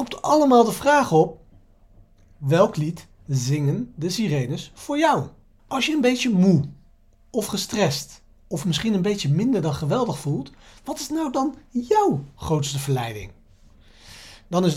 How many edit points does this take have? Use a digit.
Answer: 1